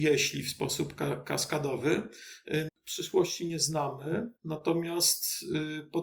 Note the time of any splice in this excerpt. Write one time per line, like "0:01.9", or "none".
0:02.7
0:04.4